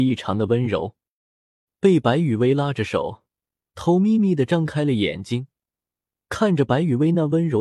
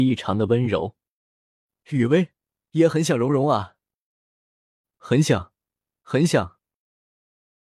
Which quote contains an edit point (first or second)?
first